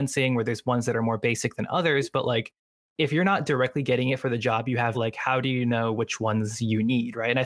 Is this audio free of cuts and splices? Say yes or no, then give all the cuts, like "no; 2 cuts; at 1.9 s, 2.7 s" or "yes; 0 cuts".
no; 1 cut; at 4.9 s